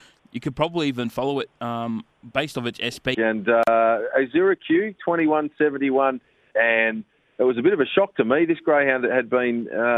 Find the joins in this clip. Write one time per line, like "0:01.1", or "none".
0:03.1
0:06.5